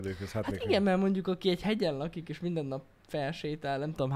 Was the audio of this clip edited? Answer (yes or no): no